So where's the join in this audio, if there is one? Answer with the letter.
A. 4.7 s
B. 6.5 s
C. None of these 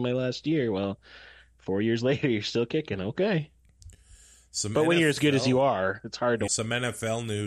B